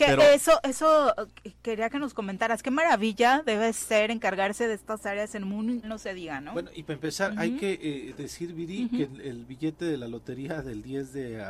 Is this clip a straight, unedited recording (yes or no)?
no